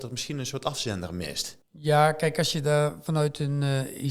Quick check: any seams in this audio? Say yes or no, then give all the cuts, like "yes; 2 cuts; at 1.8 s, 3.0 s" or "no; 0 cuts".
yes; 1 cut; at 1.6 s